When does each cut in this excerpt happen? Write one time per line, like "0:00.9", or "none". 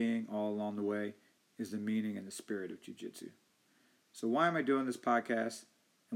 none

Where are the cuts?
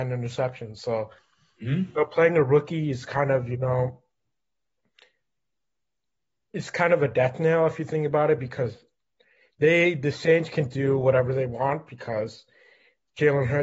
none

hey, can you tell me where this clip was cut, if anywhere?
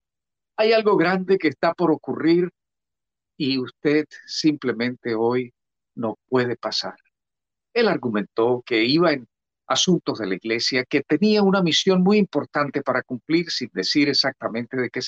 0:07.6

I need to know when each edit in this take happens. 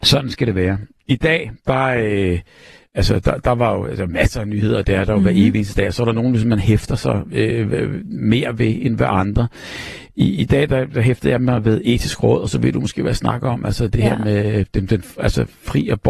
none

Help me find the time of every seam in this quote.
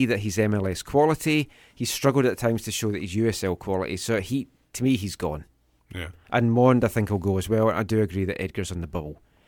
none

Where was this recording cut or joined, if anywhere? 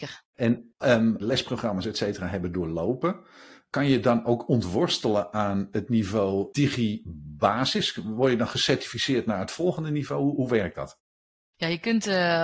0:01.2

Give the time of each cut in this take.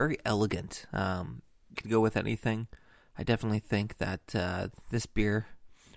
0:01.8

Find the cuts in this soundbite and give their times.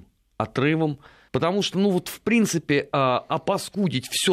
0:01.3

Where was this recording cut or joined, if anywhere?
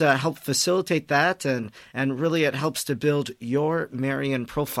none

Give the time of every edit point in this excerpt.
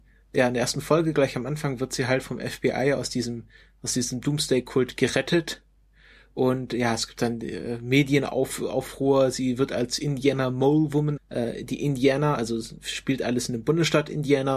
0:11.2

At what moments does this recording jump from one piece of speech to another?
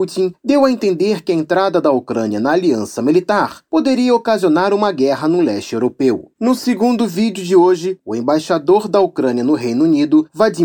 0:06.3

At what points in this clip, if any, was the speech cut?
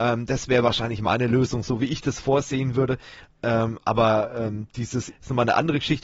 0:05.1

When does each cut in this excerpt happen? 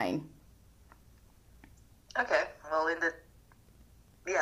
0:02.6

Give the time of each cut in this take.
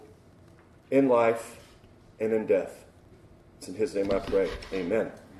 none

